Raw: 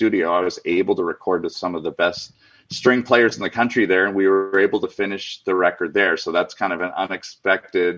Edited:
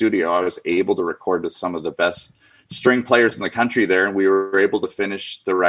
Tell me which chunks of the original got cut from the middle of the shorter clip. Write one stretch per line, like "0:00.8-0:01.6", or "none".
none